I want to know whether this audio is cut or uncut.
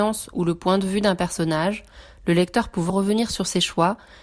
cut